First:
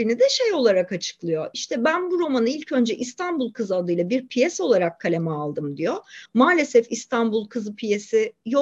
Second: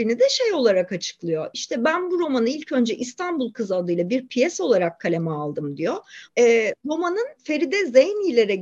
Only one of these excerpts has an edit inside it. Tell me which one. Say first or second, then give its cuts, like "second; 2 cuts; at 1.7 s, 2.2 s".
second; 2 cuts; at 6.3 s, 7.4 s